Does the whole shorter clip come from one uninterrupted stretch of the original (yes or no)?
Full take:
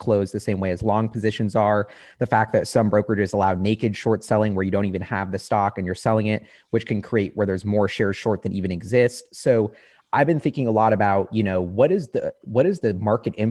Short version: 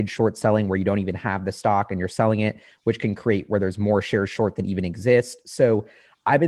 yes